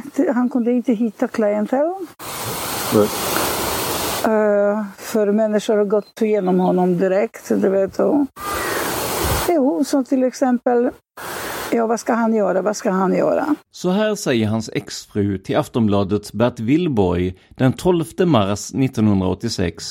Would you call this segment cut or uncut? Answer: cut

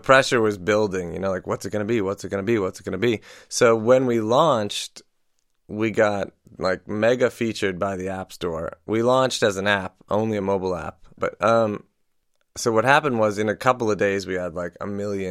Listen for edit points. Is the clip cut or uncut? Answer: cut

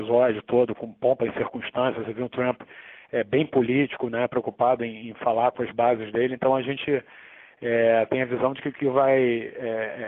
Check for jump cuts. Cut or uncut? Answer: uncut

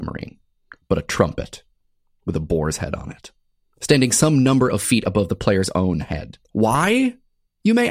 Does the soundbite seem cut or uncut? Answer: uncut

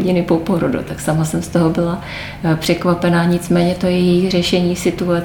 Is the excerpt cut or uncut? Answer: uncut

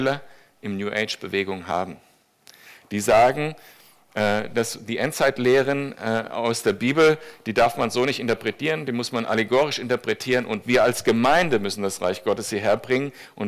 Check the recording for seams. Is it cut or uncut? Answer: uncut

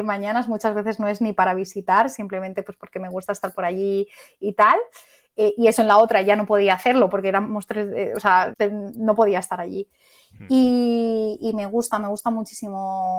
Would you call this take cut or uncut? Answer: cut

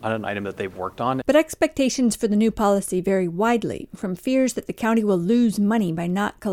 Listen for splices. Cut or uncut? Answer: cut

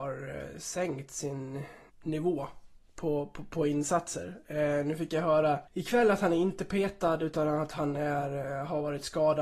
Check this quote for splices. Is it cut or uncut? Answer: cut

